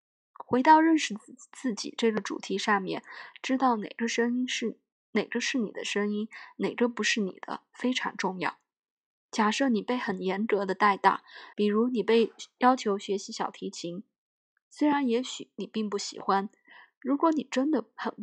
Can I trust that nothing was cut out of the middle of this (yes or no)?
no